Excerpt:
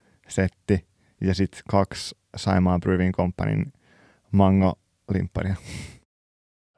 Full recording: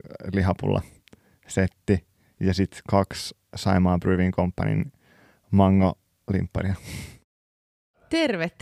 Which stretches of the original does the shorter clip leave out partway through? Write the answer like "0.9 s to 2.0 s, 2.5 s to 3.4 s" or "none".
none